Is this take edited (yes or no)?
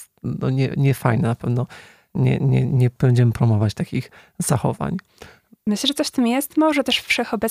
no